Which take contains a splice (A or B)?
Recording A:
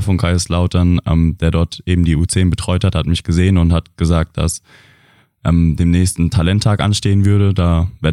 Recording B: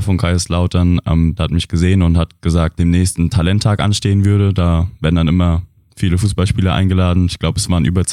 B